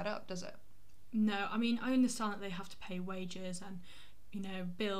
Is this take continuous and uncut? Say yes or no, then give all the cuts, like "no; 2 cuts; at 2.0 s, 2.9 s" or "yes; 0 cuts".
yes; 0 cuts